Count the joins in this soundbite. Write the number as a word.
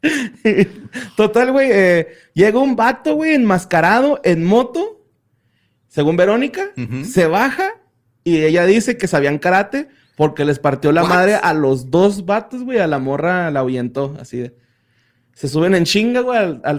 zero